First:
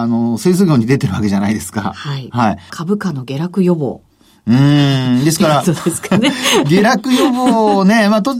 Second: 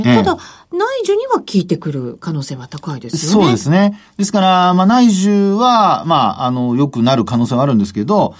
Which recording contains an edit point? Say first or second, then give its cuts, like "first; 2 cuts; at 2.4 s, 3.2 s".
first; 1 cut; at 2.7 s